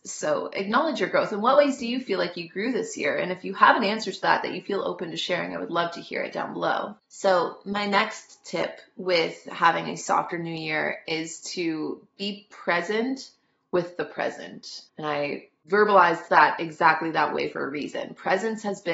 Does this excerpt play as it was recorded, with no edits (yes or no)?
no